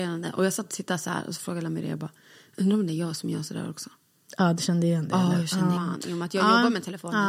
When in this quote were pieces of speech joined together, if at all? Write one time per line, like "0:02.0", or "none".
0:05.8